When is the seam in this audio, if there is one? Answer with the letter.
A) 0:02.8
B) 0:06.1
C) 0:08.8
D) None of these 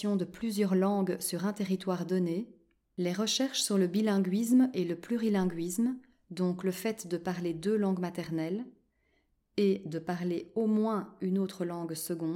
D